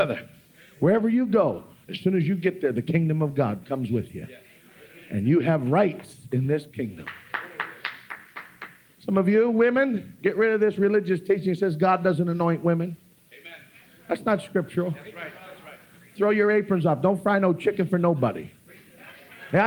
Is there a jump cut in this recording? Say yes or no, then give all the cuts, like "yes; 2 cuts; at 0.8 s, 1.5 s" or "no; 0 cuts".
no; 0 cuts